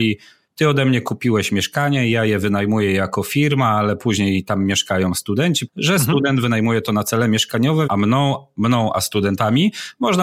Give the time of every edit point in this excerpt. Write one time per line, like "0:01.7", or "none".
0:05.7
0:07.9